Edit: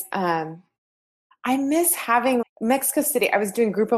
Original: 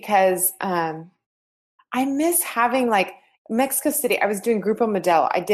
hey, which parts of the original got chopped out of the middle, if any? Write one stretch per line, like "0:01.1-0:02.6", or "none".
0:02.9-0:03.3